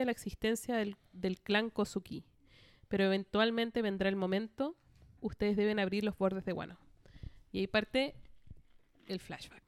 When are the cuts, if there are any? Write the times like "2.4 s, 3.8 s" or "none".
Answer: 5.2 s

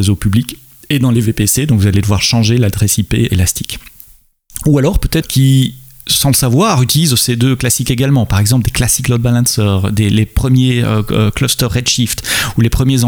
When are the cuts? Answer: 3.3 s, 5.2 s

